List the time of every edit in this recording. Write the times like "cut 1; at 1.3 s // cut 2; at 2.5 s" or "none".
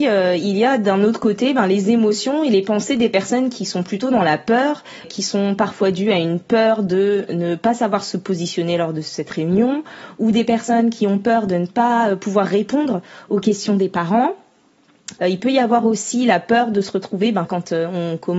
cut 1; at 5.0 s // cut 2; at 15.2 s // cut 3; at 17.5 s